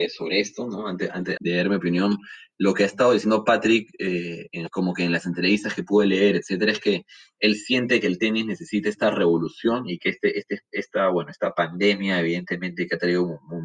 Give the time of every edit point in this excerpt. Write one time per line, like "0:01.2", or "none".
0:01.4